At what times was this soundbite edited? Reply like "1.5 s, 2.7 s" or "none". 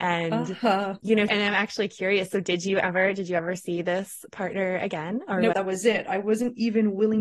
1.3 s, 5.5 s